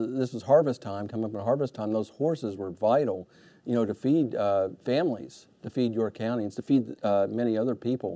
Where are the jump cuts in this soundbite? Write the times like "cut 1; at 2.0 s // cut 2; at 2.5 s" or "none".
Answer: none